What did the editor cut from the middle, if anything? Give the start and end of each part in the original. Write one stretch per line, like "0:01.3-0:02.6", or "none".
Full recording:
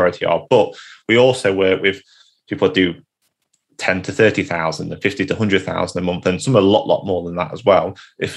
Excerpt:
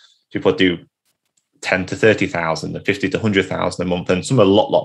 none